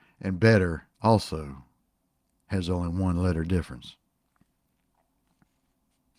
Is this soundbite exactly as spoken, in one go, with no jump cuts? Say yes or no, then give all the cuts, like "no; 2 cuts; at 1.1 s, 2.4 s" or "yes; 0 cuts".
no; 1 cut; at 0.9 s